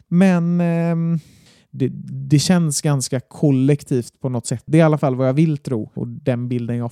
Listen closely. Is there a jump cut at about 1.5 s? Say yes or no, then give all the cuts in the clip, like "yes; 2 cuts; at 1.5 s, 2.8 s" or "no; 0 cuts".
no; 2 cuts; at 4.7 s, 6.0 s